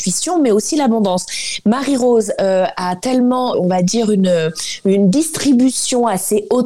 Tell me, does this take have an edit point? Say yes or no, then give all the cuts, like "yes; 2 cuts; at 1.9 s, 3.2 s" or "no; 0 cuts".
yes; 1 cut; at 3.5 s